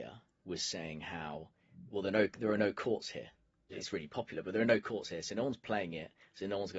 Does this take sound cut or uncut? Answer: cut